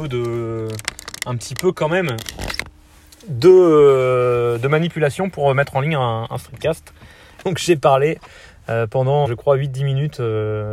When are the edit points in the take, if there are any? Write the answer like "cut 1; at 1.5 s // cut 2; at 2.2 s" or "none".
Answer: cut 1; at 7.4 s // cut 2; at 9.2 s